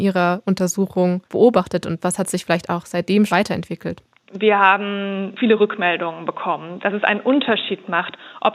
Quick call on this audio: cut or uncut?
cut